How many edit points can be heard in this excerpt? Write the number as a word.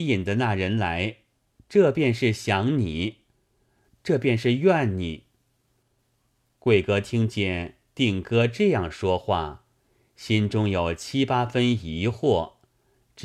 one